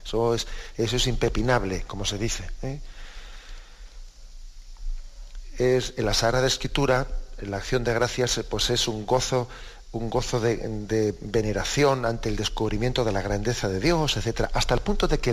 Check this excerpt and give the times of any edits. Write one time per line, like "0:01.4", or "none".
none

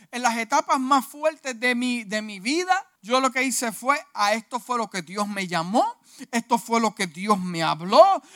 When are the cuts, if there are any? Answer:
0:03.0

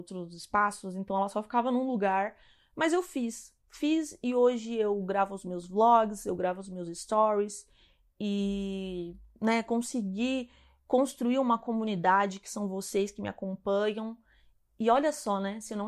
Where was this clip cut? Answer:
none

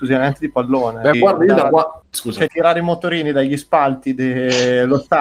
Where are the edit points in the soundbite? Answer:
0:01.1
0:02.5

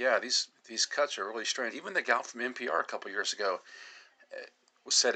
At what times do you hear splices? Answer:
0:01.7

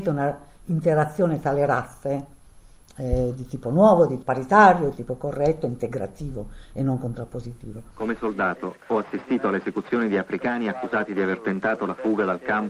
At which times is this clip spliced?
0:04.2

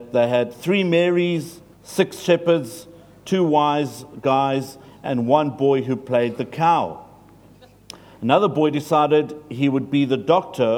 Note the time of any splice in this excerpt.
0:01.7

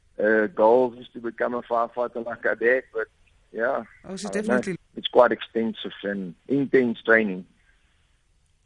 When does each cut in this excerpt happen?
0:04.8
0:06.4

